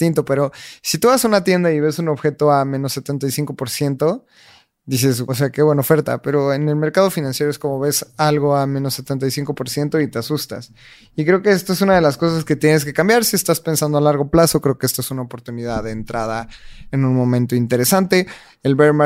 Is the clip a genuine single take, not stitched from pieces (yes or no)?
no